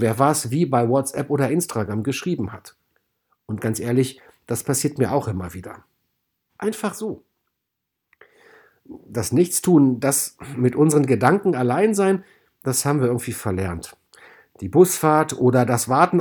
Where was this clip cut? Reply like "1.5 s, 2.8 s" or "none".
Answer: 6.5 s